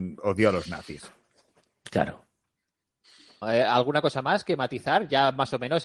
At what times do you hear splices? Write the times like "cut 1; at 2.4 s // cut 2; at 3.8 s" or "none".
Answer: cut 1; at 3.4 s